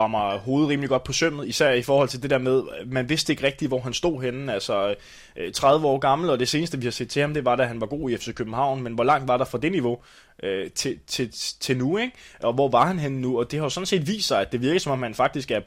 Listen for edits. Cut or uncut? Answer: uncut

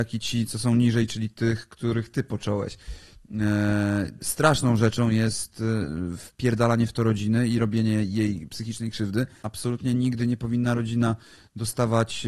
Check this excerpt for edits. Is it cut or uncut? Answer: cut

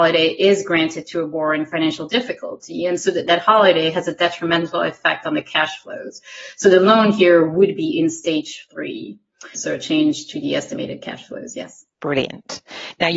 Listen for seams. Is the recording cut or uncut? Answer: cut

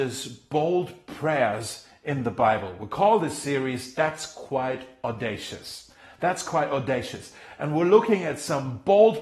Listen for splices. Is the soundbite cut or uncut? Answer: uncut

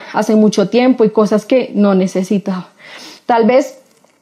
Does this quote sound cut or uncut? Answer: uncut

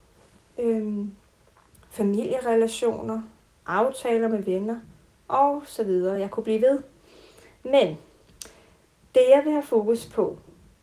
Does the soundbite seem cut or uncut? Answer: uncut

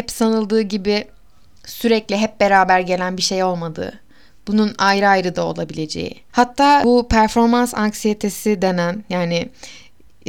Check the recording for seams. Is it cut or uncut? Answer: cut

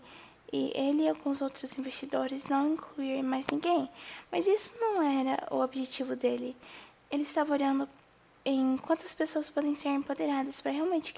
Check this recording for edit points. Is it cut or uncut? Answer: uncut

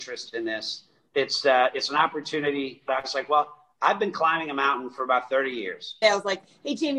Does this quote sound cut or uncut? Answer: cut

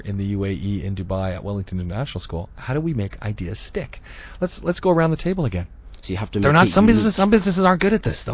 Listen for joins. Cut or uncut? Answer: cut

